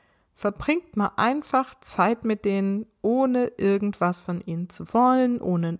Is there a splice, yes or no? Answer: no